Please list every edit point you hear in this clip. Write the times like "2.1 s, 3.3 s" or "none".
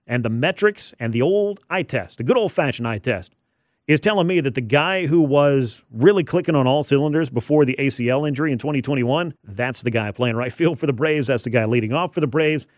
9.4 s